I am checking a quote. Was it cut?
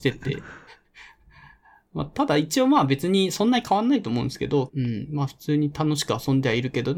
yes; 1 cut; at 4.7 s

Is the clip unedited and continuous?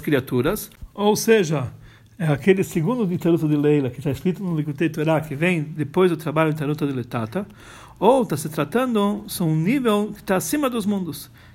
yes; 0 cuts

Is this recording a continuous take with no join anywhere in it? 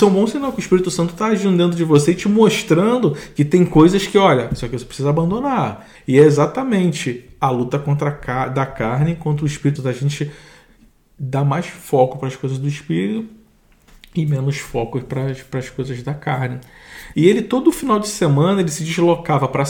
no; 3 cuts; at 6.0 s, 9.8 s, 17.1 s

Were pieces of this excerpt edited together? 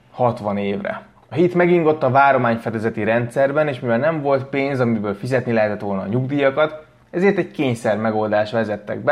yes; 1 cut; at 1.2 s

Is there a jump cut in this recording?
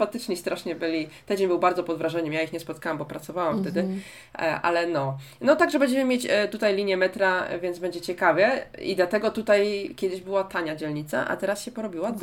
no; 0 cuts

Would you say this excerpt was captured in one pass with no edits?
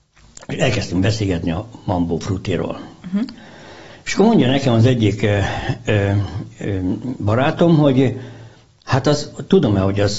yes; 0 cuts

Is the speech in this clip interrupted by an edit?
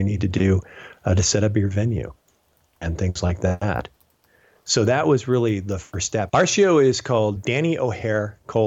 yes; 2 cuts; at 6.3 s, 7.4 s

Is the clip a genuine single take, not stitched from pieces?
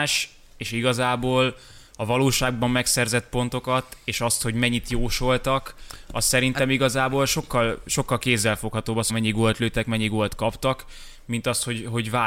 no; 1 cut; at 9.1 s

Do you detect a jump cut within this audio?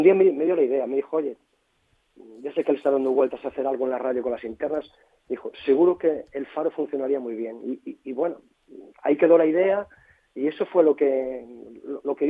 no; 0 cuts

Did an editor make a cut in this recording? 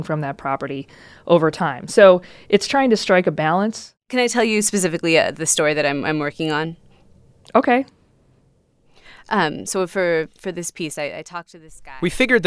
no; 0 cuts

